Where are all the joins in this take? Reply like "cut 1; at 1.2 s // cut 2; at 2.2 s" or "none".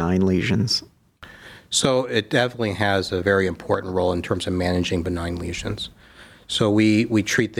none